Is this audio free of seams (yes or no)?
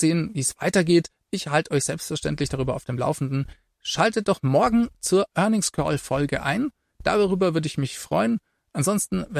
yes